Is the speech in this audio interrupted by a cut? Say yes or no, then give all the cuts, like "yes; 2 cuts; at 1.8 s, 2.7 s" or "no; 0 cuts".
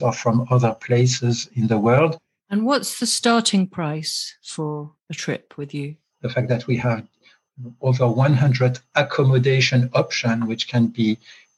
yes; 1 cut; at 6.2 s